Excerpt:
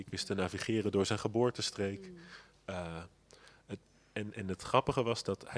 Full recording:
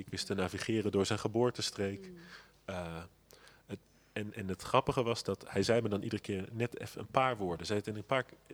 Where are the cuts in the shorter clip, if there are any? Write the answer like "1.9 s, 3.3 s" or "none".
none

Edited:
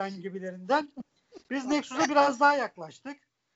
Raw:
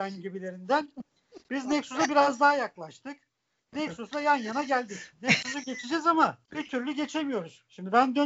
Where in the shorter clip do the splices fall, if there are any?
none

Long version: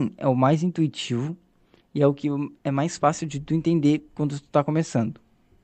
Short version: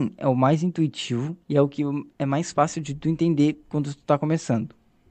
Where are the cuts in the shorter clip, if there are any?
1.4 s

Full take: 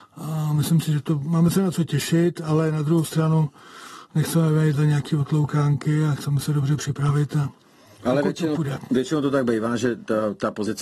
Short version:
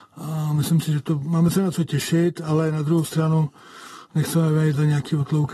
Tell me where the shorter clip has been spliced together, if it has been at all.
none

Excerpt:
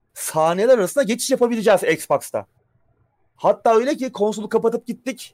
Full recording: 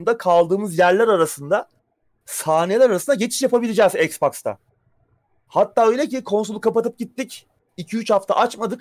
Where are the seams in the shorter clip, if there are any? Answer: none

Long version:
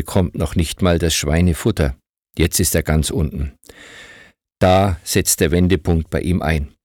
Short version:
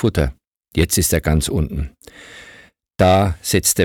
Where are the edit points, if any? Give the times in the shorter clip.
none

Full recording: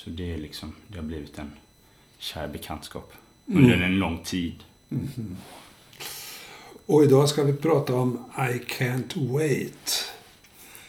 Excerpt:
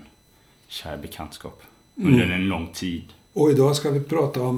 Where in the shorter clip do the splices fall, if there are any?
3.3 s

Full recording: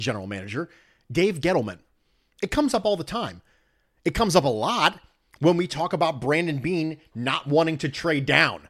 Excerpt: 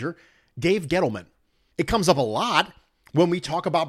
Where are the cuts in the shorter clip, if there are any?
1.7 s

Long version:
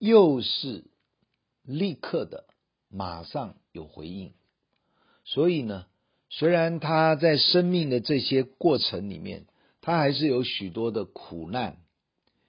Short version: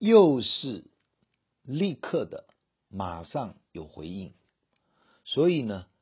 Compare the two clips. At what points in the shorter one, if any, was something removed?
none

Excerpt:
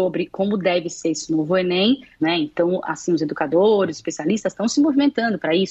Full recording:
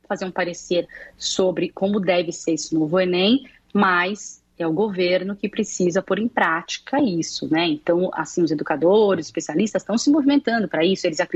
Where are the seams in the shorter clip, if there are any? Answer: 2.2 s

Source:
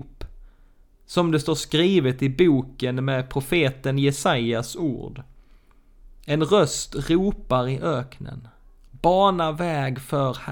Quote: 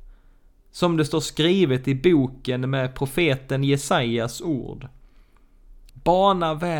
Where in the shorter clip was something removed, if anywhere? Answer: 5.9 s

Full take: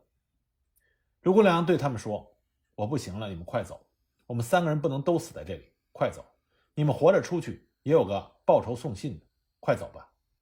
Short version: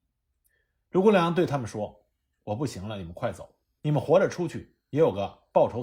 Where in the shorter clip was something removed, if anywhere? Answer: 3.8 s

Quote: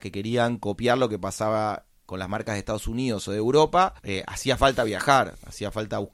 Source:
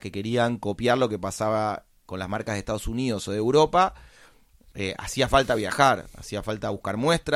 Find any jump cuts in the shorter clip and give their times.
4.0 s

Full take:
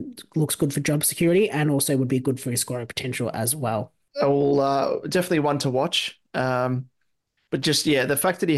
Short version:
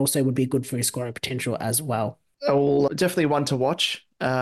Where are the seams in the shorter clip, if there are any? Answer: 2.9 s

